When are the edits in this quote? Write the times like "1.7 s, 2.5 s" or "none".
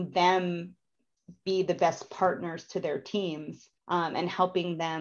3.8 s